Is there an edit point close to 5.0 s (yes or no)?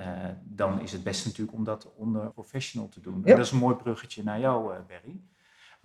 no